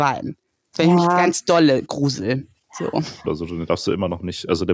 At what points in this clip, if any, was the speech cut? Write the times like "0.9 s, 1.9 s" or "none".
3.2 s